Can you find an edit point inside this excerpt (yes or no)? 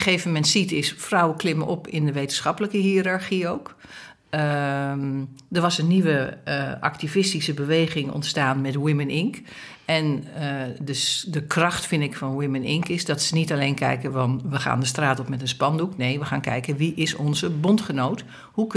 no